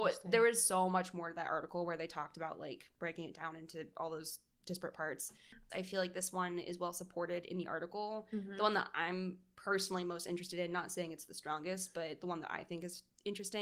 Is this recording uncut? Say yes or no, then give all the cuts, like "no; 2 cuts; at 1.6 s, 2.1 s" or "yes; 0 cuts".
no; 1 cut; at 5.7 s